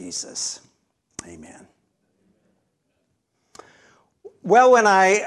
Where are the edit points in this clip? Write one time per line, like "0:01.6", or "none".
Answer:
none